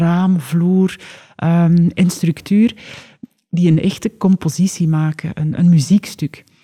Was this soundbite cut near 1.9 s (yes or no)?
no